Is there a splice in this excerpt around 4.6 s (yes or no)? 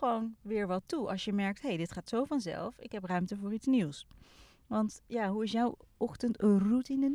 no